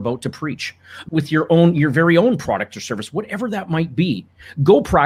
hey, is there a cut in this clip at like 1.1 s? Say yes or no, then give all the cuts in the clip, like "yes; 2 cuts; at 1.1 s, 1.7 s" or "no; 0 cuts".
yes; 1 cut; at 1.1 s